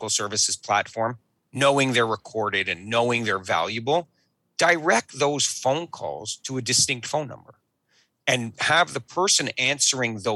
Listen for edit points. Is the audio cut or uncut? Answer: uncut